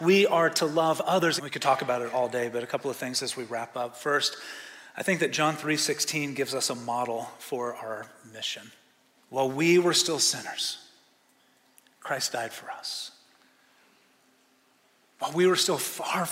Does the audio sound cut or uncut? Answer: cut